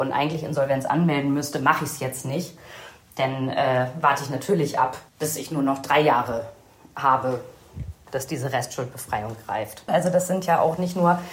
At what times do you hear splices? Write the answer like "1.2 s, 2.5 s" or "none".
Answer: 5.1 s, 9.9 s